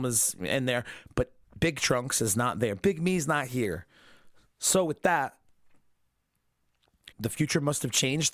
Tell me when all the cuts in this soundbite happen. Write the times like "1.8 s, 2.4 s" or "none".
7.1 s